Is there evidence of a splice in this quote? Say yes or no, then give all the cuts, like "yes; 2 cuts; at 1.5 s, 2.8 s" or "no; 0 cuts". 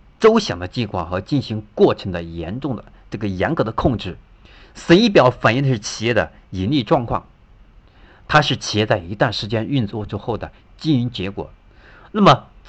no; 0 cuts